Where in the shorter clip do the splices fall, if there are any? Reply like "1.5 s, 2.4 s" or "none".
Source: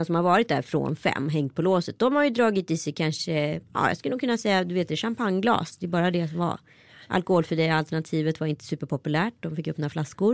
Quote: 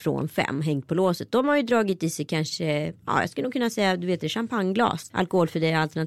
5.1 s